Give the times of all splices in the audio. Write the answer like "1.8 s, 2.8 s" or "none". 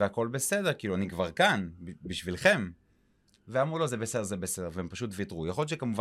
none